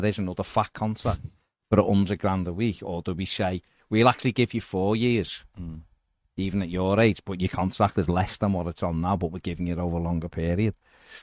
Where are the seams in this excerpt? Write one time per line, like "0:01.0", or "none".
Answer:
0:07.2

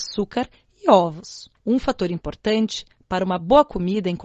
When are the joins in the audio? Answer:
0:01.6

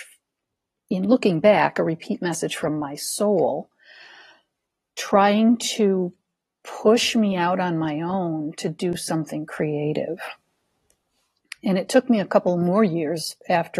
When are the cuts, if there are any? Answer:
none

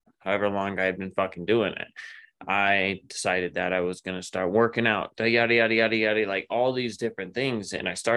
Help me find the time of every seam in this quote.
0:05.1

